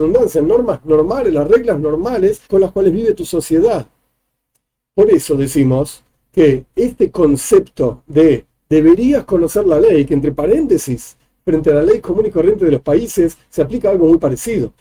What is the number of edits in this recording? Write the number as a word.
one